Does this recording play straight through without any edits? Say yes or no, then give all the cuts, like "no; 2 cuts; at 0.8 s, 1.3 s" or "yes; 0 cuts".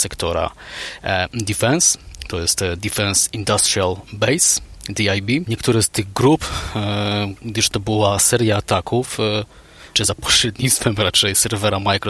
no; 2 cuts; at 5.5 s, 9.9 s